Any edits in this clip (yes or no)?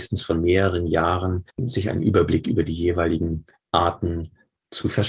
yes